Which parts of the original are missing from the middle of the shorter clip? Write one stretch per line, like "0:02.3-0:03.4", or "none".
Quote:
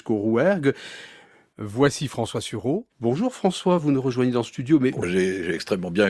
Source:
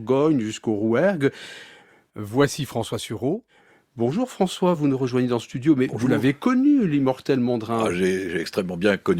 0:03.5-0:03.9
0:06.0-0:07.9